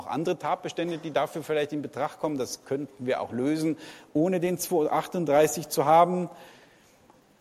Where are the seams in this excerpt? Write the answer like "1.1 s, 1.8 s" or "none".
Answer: none